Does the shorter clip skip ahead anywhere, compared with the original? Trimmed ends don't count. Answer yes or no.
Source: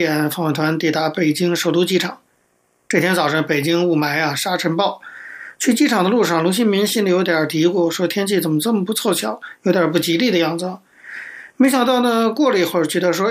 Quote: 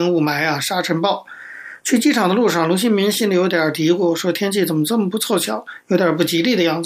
no